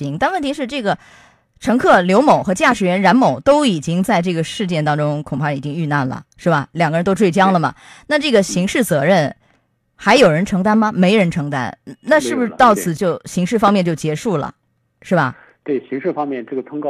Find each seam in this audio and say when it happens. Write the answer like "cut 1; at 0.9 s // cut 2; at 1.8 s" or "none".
cut 1; at 13.0 s

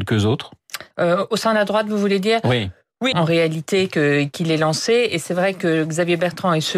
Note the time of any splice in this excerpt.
cut 1; at 0.9 s // cut 2; at 3.1 s

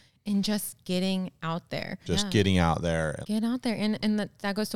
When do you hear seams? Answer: cut 1; at 2.0 s // cut 2; at 3.2 s

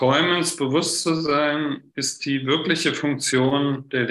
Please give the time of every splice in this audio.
none

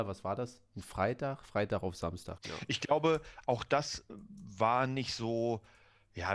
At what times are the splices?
cut 1; at 2.4 s

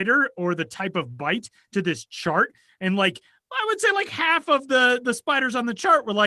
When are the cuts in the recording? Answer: none

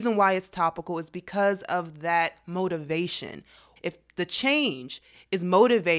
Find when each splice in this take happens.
cut 1; at 3.8 s

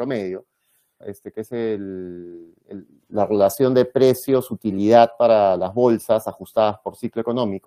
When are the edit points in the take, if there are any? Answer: cut 1; at 1.0 s // cut 2; at 2.6 s

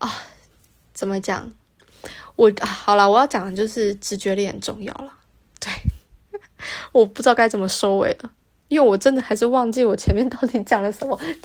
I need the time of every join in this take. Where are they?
none

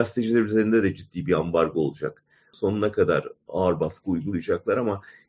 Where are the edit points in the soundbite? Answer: cut 1; at 2.5 s

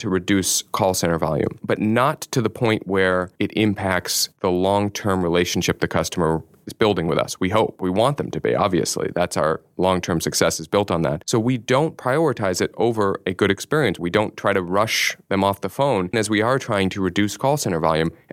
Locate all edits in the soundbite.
cut 1; at 14.0 s // cut 2; at 16.1 s

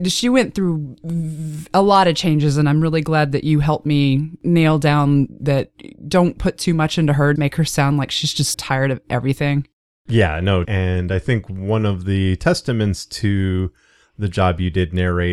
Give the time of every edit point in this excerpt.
cut 1; at 7.4 s // cut 2; at 8.5 s // cut 3; at 10.6 s

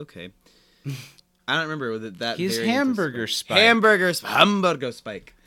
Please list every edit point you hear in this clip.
none

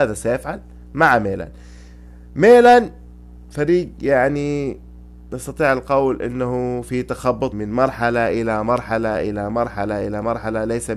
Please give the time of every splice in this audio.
cut 1; at 7.5 s

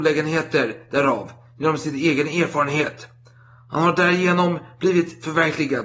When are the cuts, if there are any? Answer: none

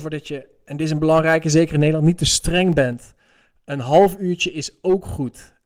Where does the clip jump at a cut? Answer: none

